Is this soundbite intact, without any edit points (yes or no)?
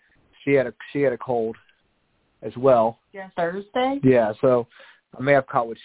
no